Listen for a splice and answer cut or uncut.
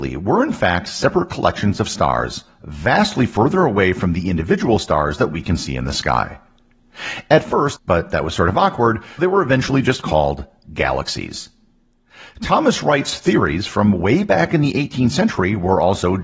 cut